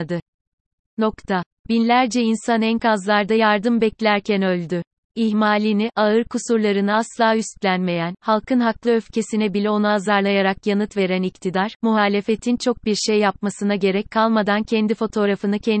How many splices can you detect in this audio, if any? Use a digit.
0